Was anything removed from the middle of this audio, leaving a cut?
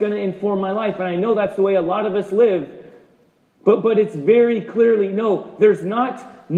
no; 0 cuts

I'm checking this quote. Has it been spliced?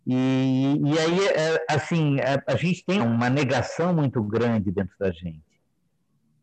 yes; 1 cut; at 3.0 s

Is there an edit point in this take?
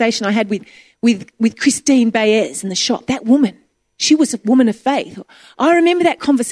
no; 0 cuts

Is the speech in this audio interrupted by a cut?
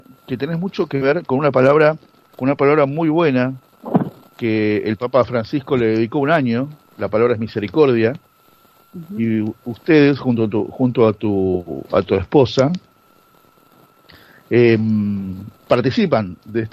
no; 0 cuts

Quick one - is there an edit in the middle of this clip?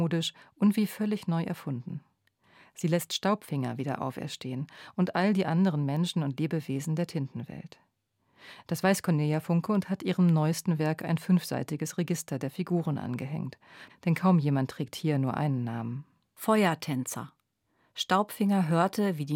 yes; 2 cuts; at 8.6 s, 13.9 s

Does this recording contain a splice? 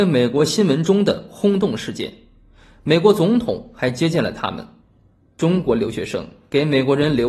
no; 0 cuts

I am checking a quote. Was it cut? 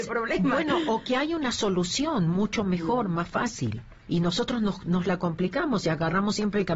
yes; 1 cut; at 4.0 s

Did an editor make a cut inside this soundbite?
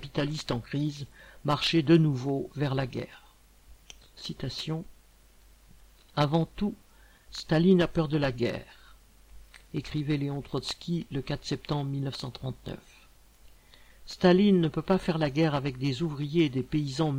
no; 0 cuts

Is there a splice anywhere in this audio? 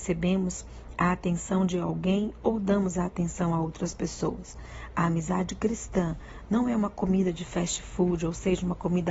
no; 0 cuts

